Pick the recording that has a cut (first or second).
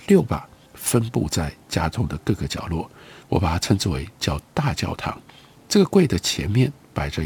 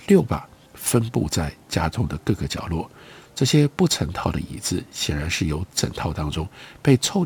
first